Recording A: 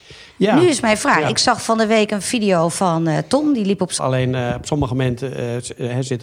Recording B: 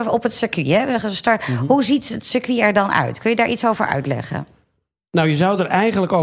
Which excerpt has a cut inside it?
A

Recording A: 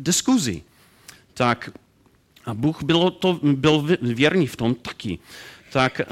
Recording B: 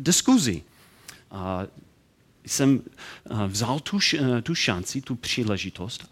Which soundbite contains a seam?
B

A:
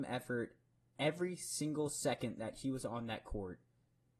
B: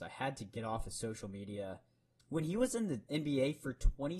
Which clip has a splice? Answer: B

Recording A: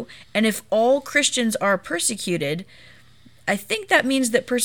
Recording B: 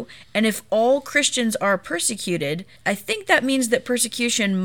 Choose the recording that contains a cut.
B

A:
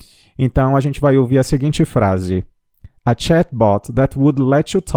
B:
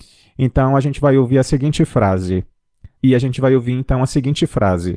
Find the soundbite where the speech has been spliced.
B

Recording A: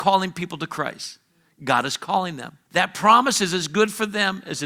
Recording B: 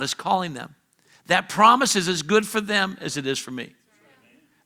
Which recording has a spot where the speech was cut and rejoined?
A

